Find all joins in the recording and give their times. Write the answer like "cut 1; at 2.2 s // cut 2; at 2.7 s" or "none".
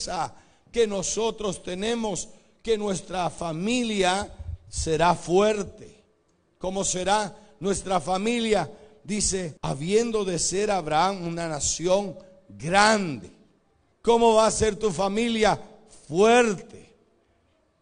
cut 1; at 9.6 s // cut 2; at 13.9 s

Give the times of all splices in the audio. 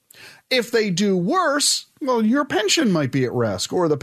none

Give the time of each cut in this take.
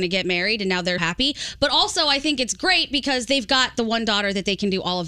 cut 1; at 1.0 s

